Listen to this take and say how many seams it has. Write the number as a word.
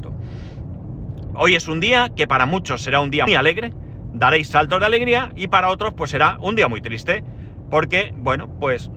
two